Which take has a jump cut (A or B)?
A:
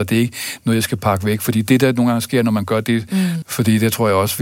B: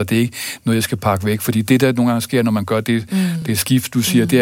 A